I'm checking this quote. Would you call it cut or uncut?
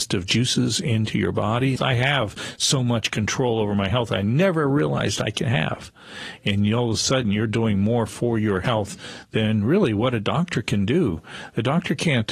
cut